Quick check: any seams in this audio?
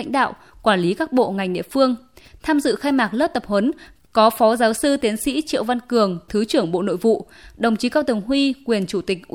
no; 0 cuts

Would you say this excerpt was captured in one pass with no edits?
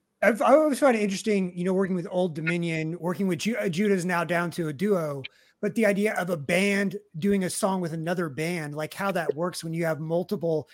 yes; 0 cuts

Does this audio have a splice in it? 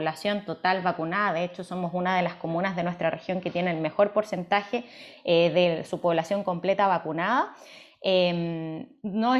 no; 0 cuts

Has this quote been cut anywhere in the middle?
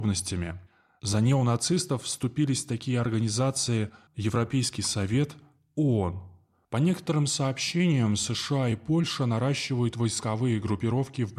yes; 2 cuts; at 4.1 s, 6.6 s

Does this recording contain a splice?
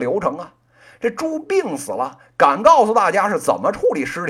no; 0 cuts

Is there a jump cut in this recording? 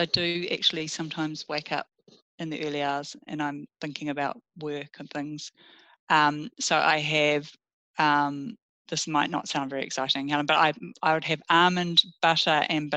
no; 0 cuts

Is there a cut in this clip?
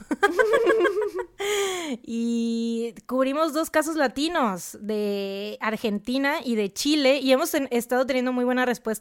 no; 0 cuts

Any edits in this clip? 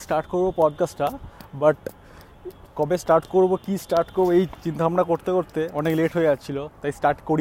no; 0 cuts

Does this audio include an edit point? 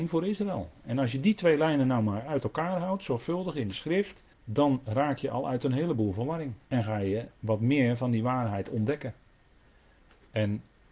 yes; 2 cuts; at 4.3 s, 6.6 s

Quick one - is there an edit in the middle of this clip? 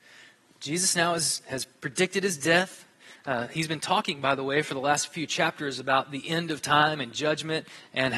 no; 0 cuts

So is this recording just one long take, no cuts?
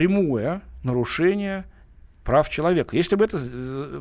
yes; 0 cuts

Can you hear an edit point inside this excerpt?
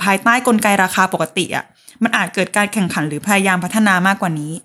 no; 0 cuts

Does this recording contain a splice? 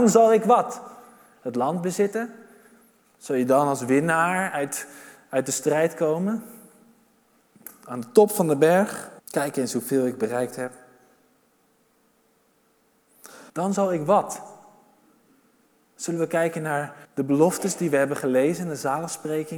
yes; 3 cuts; at 9.2 s, 13.5 s, 17.0 s

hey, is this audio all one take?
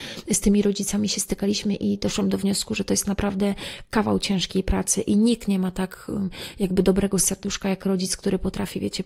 yes; 0 cuts

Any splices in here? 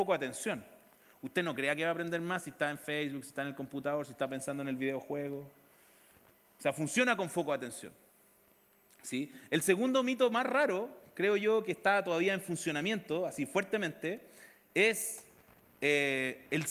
no; 0 cuts

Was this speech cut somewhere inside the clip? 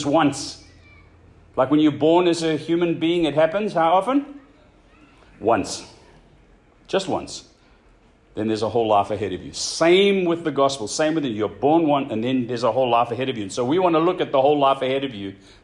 no; 0 cuts

